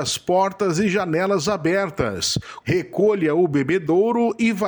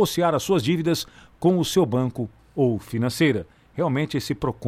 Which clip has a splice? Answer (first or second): first